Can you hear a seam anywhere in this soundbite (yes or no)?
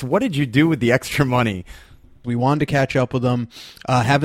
yes